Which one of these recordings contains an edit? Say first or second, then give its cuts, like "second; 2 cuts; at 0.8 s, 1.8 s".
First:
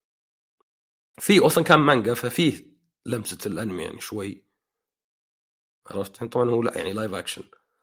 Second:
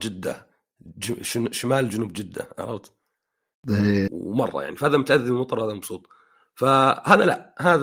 second; 1 cut; at 4.1 s